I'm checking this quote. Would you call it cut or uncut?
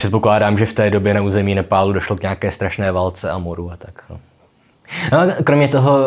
uncut